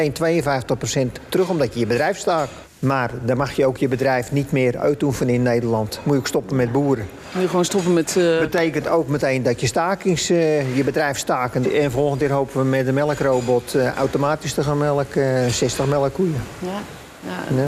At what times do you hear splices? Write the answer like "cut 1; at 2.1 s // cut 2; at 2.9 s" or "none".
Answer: cut 1; at 2.6 s // cut 2; at 11.6 s